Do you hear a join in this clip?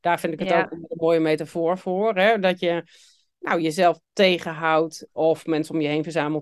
yes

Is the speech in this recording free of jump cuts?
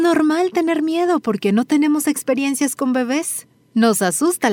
yes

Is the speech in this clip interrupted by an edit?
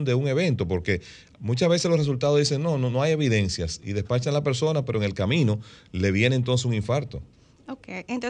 no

